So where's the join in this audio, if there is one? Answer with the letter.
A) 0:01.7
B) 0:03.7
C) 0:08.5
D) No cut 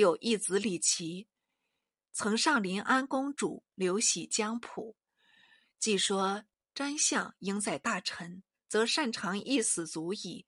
B